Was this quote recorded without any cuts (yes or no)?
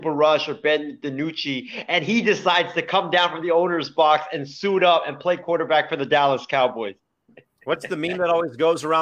yes